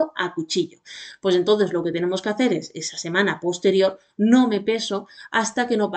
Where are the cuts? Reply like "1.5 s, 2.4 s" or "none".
none